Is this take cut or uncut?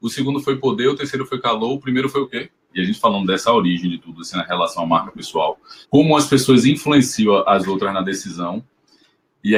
cut